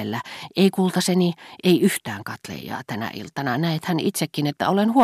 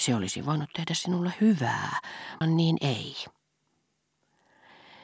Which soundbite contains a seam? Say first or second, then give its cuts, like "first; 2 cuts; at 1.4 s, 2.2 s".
second; 1 cut; at 2.4 s